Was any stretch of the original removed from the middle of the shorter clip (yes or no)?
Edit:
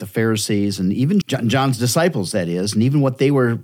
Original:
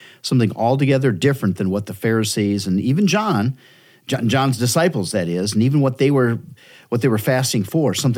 yes